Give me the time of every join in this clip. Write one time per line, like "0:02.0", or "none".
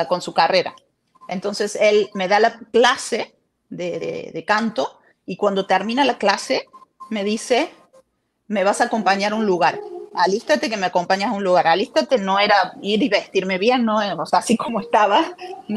none